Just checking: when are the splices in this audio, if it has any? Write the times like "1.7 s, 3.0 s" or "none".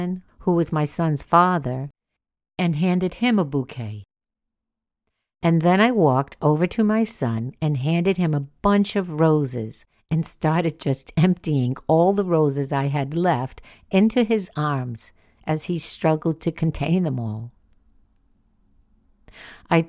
none